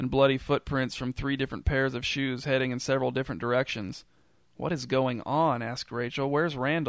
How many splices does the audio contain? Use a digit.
0